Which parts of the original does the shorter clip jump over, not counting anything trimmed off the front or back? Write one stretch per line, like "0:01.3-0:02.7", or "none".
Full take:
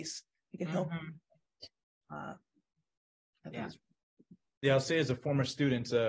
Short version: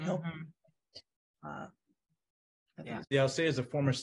0:03.7-0:04.5